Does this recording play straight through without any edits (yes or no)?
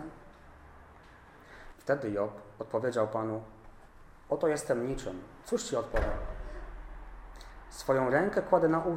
no